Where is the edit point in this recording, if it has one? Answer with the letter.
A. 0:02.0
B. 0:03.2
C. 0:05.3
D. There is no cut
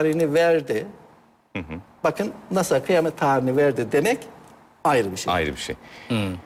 D